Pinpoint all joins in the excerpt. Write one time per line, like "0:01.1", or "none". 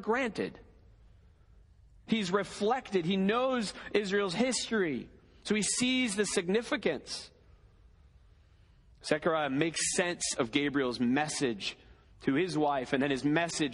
0:02.1

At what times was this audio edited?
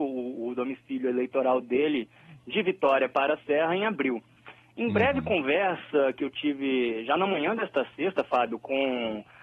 none

